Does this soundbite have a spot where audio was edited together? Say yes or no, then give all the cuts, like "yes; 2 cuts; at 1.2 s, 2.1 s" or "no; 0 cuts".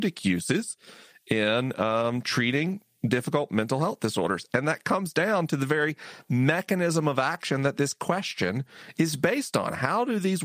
no; 0 cuts